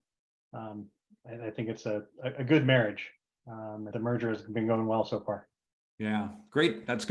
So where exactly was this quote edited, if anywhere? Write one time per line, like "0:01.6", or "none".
0:03.9